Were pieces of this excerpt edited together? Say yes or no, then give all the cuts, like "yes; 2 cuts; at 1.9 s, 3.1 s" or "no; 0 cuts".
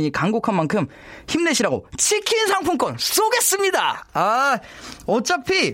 no; 0 cuts